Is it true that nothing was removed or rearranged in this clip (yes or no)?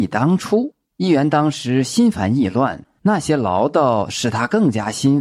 no